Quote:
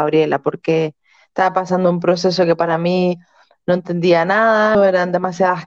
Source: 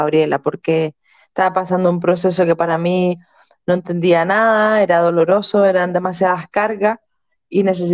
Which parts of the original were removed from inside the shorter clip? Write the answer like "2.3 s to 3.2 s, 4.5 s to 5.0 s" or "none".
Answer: 4.7 s to 5.6 s